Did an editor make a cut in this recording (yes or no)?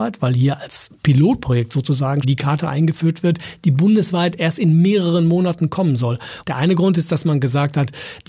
yes